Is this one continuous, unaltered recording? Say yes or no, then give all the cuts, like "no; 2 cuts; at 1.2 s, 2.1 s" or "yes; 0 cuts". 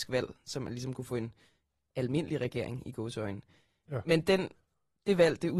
yes; 0 cuts